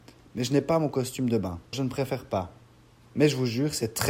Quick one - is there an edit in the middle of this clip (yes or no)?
yes